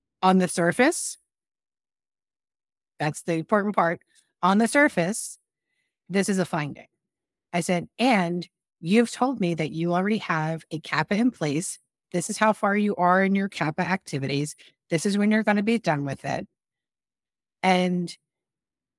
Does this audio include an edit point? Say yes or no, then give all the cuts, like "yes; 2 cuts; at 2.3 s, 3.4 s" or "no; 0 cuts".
no; 0 cuts